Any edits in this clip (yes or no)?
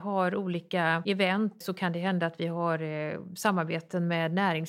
yes